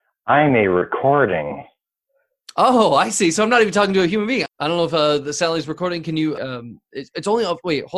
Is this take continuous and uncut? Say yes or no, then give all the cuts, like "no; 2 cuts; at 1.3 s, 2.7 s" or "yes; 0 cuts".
no; 2 cuts; at 4.5 s, 6.4 s